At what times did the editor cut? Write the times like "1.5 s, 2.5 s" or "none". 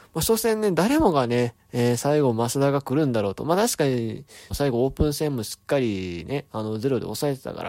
4.5 s